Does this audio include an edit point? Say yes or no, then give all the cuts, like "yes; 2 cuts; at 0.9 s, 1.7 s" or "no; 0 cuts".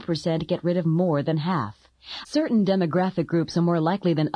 yes; 1 cut; at 2.2 s